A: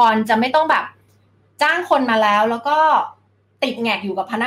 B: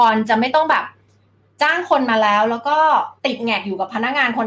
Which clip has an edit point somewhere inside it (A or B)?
B